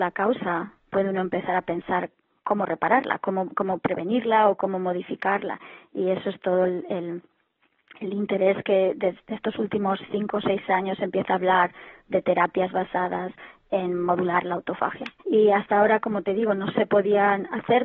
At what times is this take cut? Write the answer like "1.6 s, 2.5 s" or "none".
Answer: 15.2 s